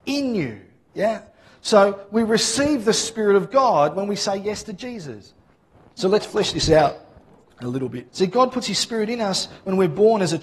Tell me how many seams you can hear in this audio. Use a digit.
2